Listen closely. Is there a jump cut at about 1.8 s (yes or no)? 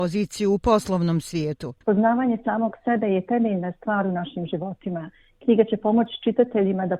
yes